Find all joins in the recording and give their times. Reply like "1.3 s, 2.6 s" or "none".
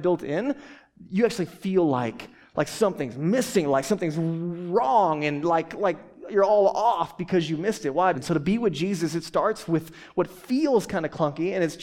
8.1 s